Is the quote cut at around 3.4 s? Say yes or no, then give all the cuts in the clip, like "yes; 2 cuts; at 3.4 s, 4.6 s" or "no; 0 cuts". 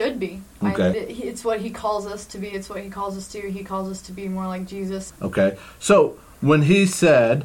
no; 2 cuts; at 0.9 s, 5.1 s